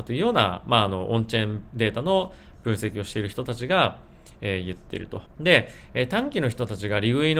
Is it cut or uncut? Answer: cut